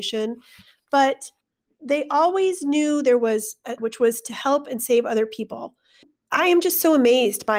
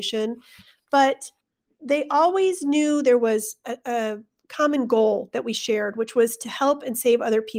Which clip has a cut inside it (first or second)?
first